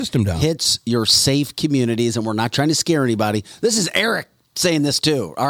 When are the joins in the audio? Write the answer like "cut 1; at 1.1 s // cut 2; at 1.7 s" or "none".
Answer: none